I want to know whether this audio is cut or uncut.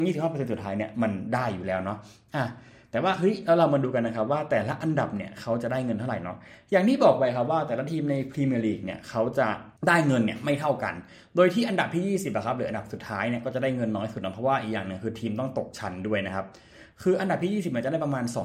cut